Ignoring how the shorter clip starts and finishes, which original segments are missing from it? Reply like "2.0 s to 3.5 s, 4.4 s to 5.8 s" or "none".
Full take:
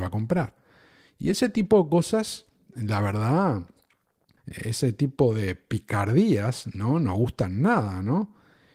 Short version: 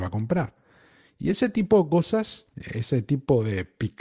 2.5 s to 4.4 s